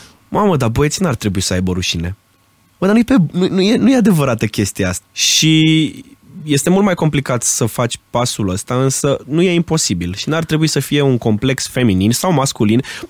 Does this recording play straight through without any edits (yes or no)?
no